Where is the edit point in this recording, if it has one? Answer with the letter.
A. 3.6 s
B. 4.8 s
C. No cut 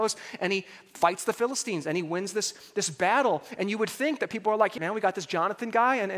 B